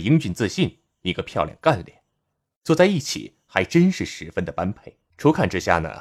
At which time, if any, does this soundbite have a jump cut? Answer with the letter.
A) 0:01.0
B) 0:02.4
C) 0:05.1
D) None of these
C